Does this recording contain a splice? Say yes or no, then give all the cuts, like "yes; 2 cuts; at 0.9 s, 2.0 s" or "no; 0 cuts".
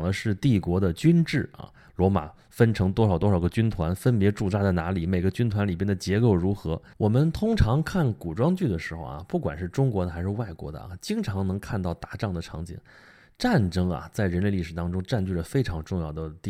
yes; 1 cut; at 6.9 s